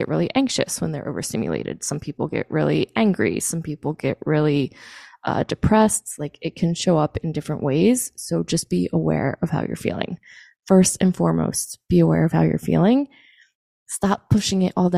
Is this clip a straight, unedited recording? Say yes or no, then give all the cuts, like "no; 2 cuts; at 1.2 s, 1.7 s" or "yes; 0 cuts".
yes; 0 cuts